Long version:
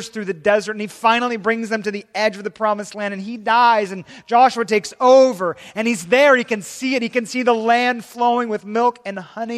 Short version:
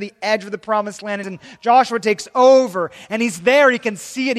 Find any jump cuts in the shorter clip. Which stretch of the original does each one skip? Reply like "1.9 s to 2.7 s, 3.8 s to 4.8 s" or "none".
3.2 s to 3.9 s

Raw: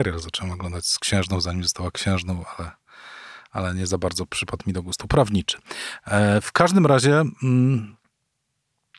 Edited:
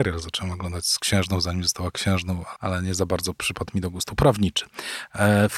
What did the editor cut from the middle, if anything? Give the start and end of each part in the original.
2.6 s to 3.5 s

